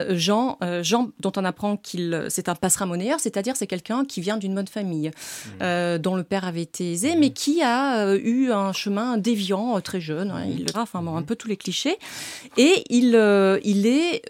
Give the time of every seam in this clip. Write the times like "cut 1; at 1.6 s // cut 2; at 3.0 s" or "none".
cut 1; at 10.7 s

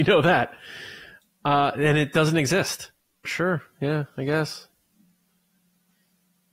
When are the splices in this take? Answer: cut 1; at 3.3 s

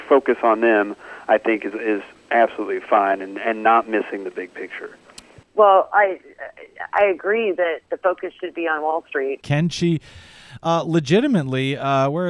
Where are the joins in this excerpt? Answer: cut 1; at 5.4 s // cut 2; at 9.4 s

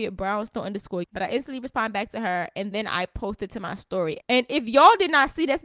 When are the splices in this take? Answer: cut 1; at 1.0 s // cut 2; at 4.2 s

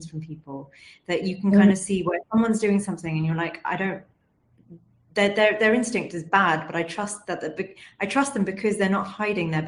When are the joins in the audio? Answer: none

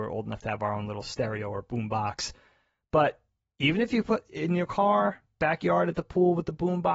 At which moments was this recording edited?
none

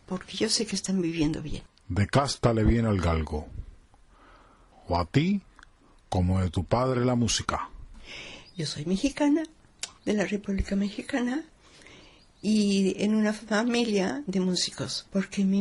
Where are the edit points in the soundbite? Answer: cut 1; at 4.7 s // cut 2; at 10.0 s

